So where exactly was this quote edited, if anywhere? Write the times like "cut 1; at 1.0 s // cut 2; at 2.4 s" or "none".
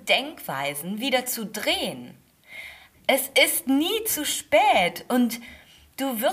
cut 1; at 2.9 s